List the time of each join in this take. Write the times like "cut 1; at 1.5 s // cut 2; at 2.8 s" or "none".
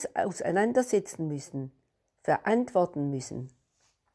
none